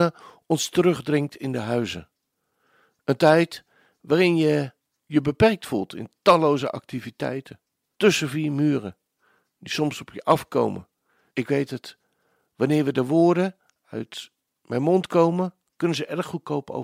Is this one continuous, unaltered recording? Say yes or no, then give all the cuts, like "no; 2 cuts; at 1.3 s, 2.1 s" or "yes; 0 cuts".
no; 2 cuts; at 7.9 s, 11.3 s